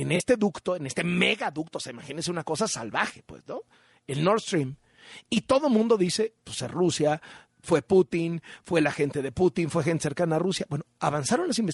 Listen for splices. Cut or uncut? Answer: uncut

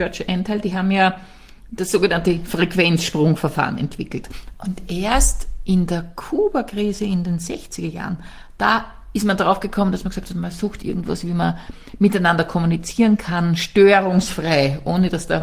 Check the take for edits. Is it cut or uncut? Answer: cut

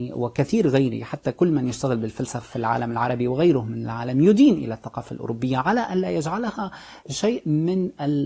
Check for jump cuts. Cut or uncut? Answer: uncut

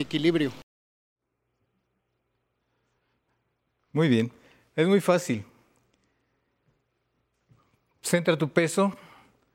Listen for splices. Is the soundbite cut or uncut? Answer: uncut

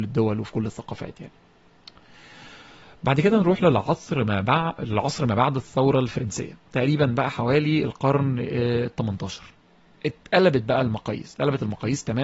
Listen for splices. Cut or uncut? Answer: uncut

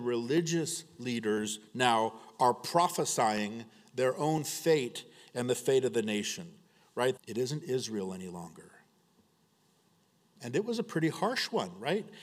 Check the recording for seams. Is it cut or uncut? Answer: cut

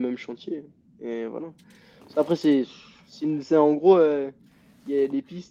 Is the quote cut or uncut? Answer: uncut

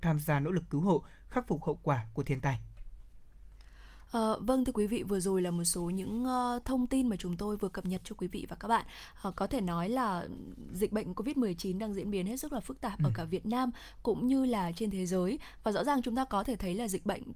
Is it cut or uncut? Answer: uncut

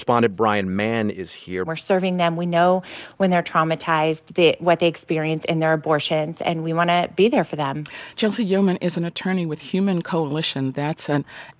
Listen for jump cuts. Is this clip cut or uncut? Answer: cut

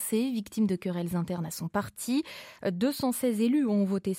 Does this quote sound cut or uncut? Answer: cut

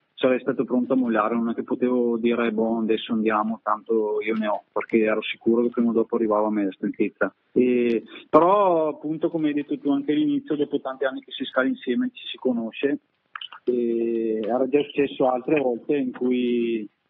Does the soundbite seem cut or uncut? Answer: uncut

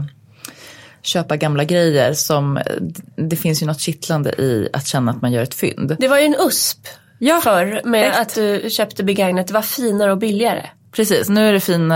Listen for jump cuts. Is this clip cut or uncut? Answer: cut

